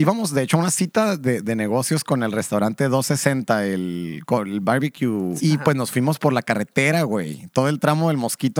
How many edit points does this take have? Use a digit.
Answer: 1